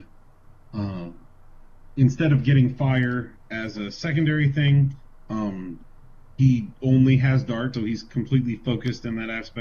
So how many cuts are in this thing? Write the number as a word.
one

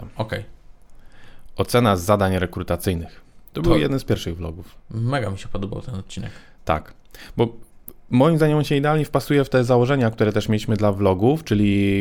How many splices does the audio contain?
one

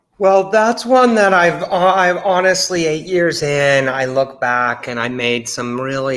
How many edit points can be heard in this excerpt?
zero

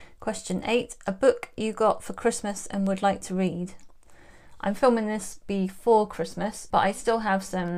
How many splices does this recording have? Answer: one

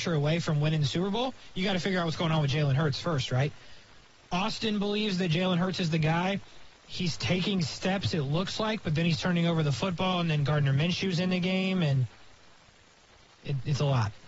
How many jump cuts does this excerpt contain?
one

